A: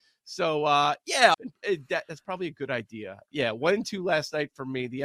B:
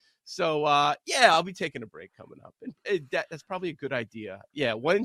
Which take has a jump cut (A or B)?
A